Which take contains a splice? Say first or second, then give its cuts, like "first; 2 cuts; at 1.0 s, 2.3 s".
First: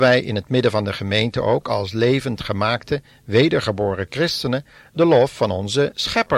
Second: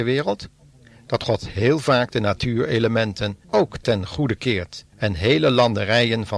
second; 2 cuts; at 3.4 s, 4.9 s